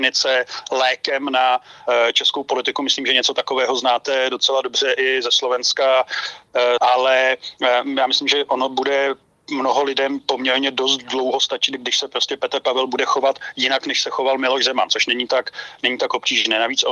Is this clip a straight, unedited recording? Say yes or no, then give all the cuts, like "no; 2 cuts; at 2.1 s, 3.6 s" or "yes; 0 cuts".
no; 1 cut; at 6.8 s